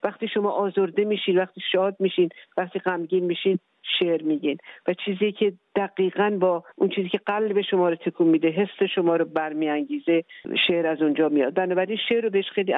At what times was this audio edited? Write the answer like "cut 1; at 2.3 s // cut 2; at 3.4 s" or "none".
cut 1; at 6.7 s